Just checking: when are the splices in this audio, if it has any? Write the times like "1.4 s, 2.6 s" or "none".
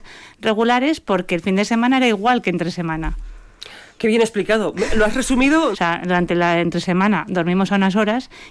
5.7 s